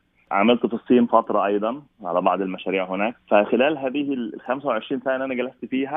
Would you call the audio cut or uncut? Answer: cut